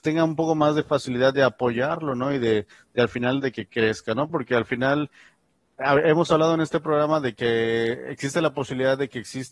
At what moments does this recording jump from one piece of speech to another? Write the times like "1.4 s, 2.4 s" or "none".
4.3 s